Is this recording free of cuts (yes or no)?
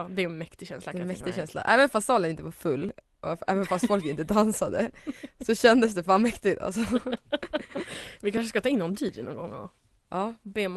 yes